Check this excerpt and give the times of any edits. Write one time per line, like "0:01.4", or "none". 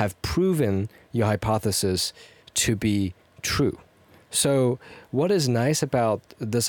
none